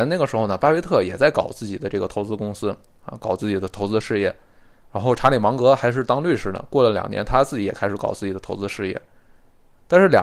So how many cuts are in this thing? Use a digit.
0